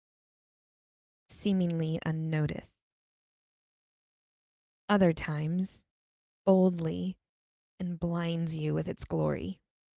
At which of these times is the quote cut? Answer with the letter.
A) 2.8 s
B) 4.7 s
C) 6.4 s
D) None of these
C